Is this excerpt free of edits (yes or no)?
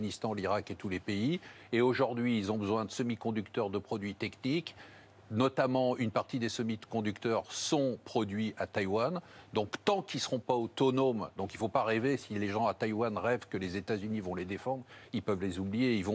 yes